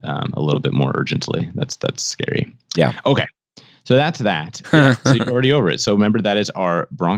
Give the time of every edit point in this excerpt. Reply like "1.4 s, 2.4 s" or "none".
4.6 s